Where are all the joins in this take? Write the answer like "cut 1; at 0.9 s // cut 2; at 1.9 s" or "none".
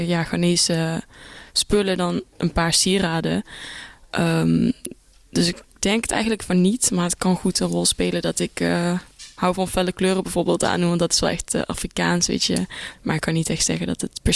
cut 1; at 12.9 s